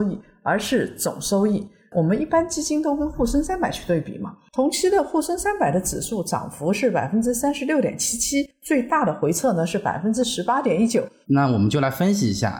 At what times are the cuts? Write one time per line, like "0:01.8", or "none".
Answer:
0:11.2